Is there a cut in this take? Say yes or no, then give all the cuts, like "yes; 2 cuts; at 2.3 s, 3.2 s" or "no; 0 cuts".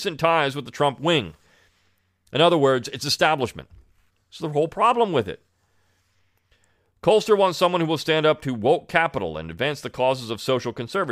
yes; 1 cut; at 4.1 s